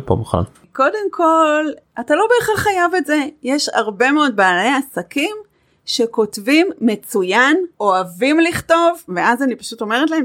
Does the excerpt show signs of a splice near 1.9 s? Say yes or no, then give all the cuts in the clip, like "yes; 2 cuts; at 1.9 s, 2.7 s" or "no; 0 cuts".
no; 2 cuts; at 7.7 s, 9.1 s